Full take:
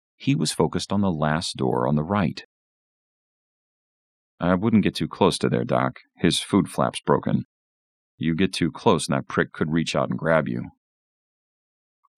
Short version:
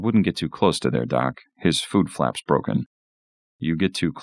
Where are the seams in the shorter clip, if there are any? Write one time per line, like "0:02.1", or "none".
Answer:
none